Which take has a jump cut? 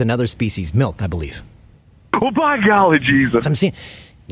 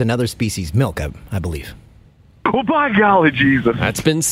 first; 2 cuts; at 1.0 s, 3.4 s

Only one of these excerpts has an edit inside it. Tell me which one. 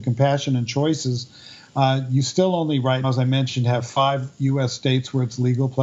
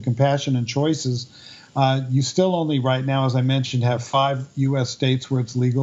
first; 1 cut; at 3.0 s

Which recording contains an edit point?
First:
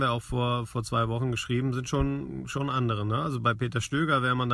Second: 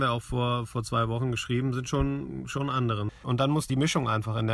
second; 1 cut; at 3.1 s

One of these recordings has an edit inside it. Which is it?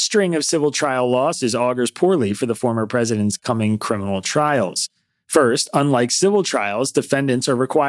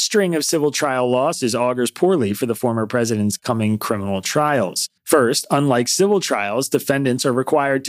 second; 1 cut; at 5.0 s

